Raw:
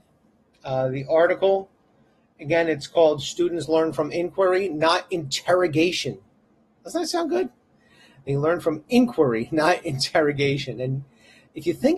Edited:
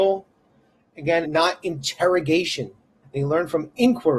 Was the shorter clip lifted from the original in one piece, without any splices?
no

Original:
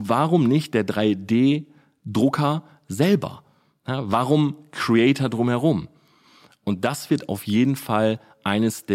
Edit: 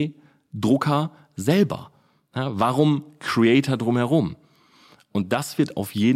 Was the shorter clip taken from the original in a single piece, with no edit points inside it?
yes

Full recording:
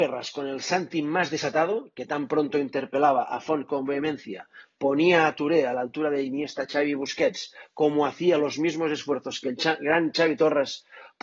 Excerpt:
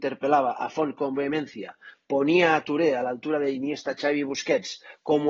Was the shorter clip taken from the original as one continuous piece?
yes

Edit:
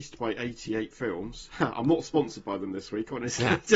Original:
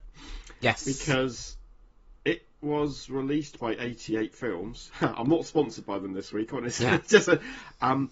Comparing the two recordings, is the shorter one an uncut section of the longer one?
yes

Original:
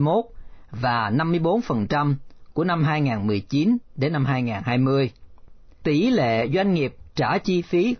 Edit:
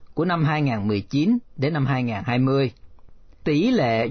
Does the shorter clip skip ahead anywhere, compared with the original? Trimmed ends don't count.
no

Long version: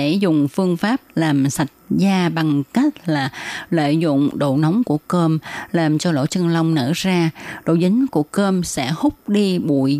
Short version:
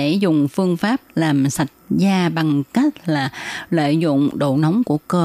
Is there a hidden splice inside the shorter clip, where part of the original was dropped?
no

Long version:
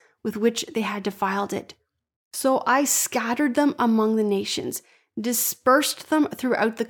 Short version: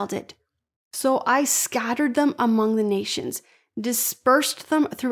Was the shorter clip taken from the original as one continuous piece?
yes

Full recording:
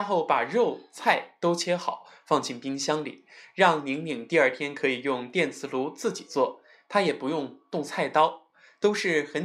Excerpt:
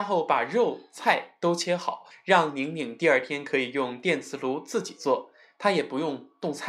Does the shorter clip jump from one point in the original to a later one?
yes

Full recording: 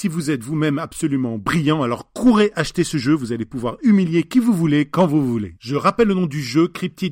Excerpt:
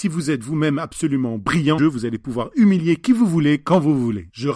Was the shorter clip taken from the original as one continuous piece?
no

